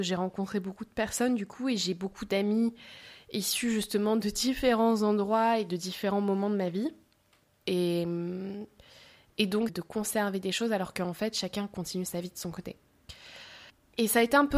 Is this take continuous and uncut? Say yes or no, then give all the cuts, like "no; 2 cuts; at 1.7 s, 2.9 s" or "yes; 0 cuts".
no; 2 cuts; at 7.6 s, 9.7 s